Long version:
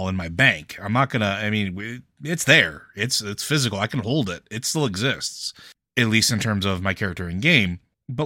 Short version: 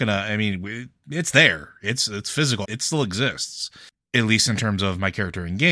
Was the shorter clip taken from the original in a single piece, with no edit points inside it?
no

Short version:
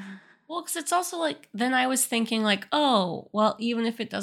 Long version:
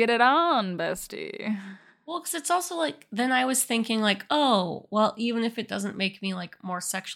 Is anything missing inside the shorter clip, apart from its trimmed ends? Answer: no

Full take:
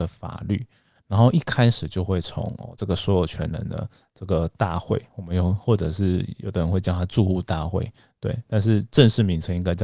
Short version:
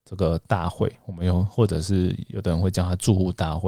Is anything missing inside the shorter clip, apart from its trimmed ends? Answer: no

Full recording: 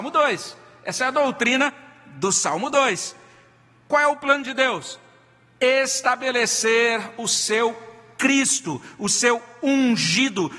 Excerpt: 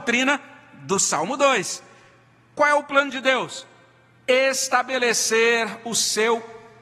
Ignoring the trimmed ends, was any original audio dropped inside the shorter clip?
no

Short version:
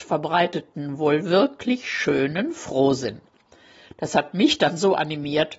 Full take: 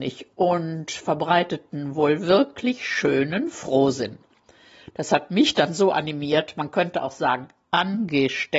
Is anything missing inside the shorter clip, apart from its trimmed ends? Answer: no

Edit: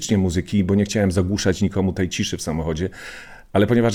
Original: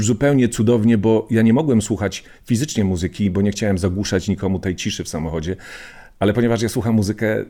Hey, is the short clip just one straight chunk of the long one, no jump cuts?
yes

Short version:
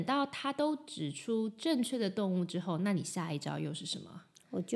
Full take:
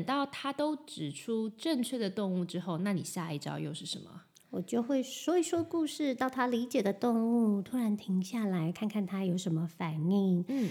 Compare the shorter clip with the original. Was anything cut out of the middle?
no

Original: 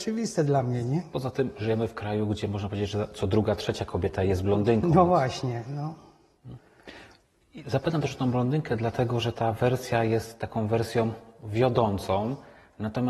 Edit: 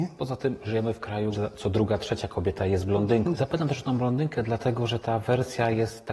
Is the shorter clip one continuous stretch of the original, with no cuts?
no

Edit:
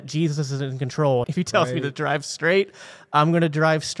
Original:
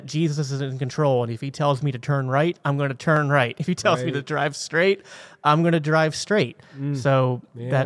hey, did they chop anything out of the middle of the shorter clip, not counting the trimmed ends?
yes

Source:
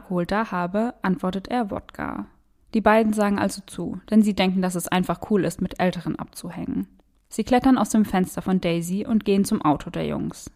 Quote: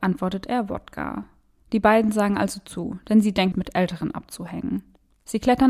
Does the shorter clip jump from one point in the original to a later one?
yes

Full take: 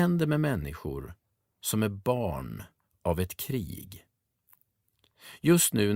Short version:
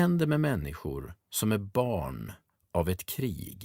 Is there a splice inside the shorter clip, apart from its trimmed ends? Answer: yes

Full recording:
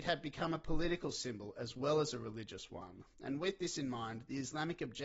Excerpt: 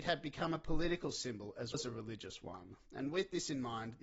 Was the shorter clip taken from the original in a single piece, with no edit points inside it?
no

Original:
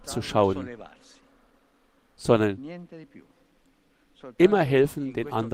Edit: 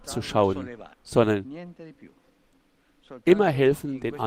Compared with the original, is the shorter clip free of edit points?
no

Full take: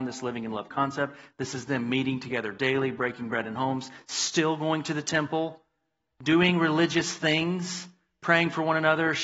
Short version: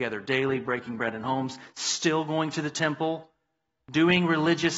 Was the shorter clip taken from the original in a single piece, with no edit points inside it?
yes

